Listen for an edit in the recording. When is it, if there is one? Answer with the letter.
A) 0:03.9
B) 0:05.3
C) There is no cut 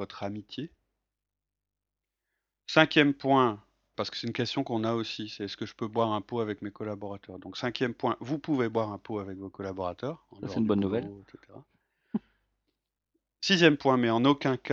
A